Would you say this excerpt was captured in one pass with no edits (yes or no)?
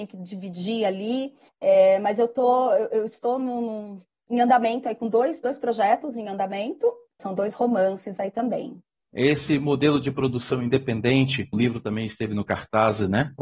no